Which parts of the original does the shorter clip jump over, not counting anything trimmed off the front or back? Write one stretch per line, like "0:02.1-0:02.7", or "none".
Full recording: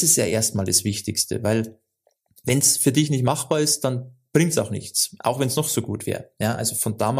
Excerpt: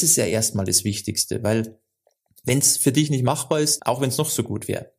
0:03.8-0:05.2